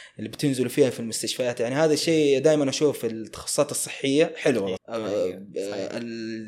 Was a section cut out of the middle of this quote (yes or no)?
yes